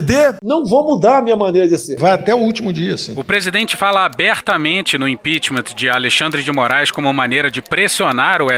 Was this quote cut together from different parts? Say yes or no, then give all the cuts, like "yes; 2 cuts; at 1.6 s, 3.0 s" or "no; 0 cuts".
no; 0 cuts